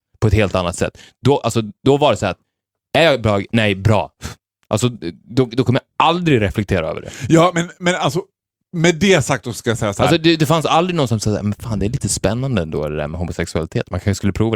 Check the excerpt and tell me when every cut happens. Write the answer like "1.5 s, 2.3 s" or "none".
none